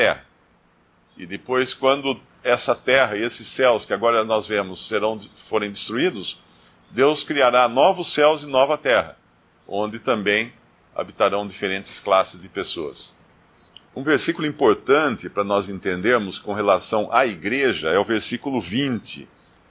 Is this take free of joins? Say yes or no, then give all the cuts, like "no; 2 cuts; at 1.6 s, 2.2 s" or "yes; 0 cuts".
yes; 0 cuts